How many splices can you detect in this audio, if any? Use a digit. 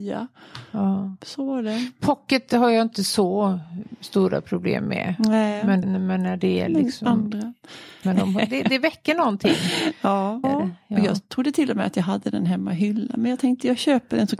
3